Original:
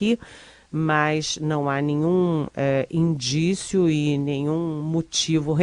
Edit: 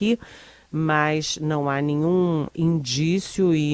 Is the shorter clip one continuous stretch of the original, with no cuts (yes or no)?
no